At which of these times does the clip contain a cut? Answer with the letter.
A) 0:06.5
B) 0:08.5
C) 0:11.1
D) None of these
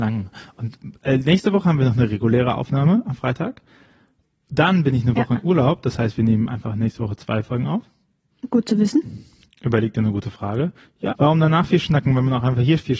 C